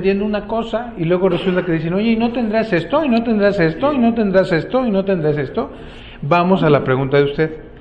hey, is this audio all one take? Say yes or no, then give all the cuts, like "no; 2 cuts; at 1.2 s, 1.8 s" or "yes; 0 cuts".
yes; 0 cuts